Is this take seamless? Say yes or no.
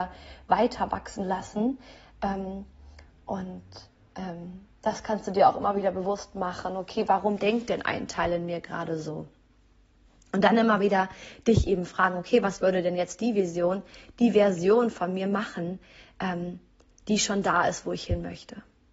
yes